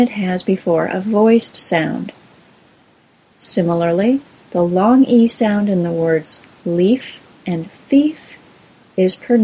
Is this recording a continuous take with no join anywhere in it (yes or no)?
no